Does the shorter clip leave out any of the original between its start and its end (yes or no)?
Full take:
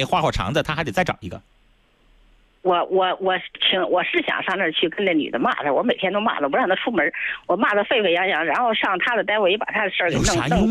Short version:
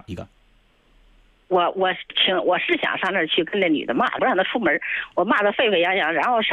yes